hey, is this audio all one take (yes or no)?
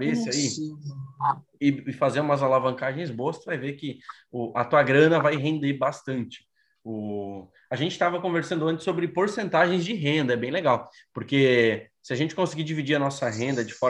yes